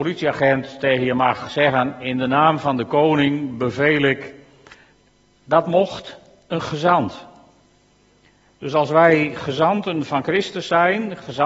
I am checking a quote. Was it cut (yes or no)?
no